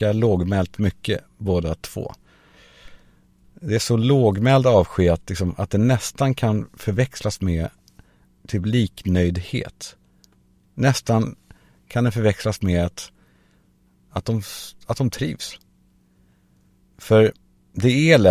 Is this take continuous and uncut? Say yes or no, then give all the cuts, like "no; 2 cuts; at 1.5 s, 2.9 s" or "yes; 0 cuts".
yes; 0 cuts